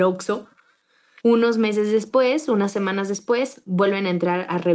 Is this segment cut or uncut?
cut